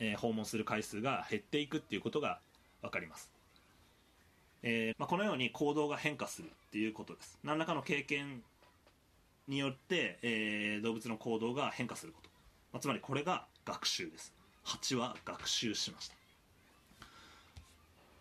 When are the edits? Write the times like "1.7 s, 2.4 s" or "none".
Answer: 4.9 s